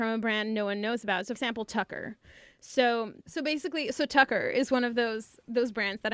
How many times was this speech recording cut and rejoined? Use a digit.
0